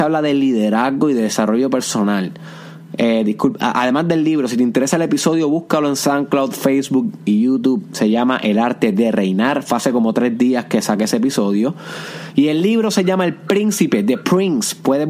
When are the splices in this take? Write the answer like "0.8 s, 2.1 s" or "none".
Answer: none